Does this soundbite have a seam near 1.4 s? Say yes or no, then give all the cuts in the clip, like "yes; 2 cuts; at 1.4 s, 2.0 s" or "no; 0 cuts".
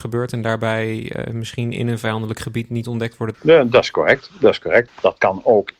no; 2 cuts; at 3.3 s, 4.9 s